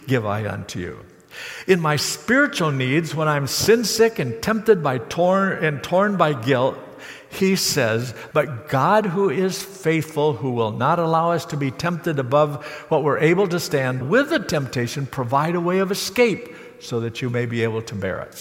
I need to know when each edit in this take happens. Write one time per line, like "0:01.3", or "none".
0:08.3
0:14.0